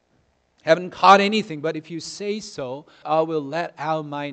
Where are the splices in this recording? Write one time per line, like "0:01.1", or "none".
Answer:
0:03.0